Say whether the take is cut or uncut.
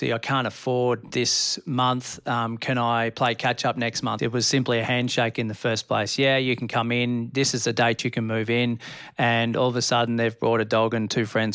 cut